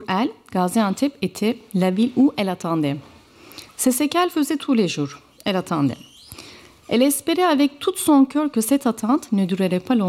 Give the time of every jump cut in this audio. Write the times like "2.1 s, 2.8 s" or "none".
none